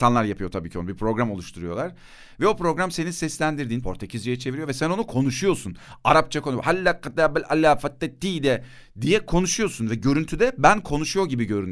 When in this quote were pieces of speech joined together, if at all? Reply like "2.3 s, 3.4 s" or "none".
3.8 s